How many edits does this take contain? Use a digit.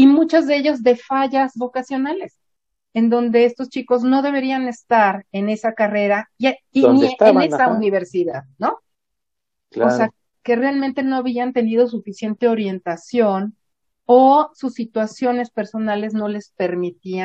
0